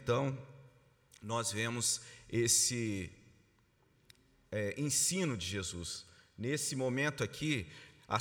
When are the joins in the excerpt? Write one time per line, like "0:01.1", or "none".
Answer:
none